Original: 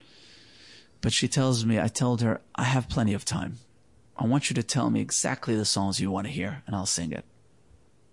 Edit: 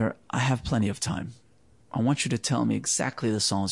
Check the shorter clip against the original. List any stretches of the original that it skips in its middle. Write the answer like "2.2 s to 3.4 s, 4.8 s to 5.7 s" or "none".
none